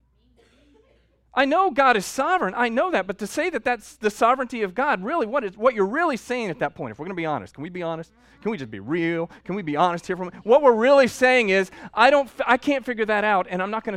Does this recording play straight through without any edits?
yes; 0 cuts

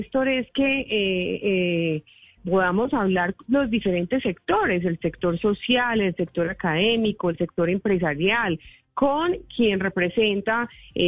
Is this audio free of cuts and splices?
no; 1 cut; at 2.4 s

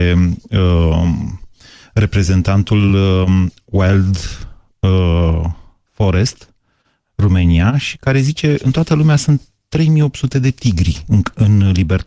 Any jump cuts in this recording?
no; 0 cuts

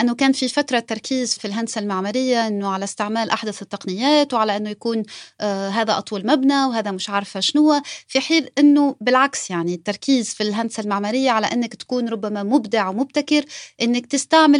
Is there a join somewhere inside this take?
yes; 1 cut; at 1.4 s

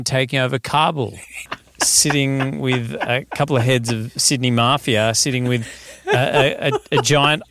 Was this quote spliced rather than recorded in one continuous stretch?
yes; 1 cut; at 1.5 s

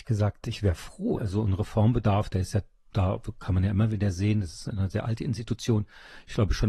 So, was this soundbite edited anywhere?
yes; 1 cut; at 1.2 s

